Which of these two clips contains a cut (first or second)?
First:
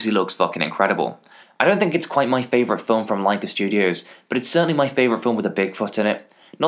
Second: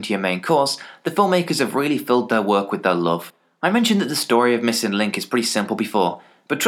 first